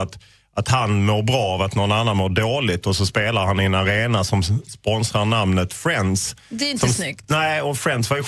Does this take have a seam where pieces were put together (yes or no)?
no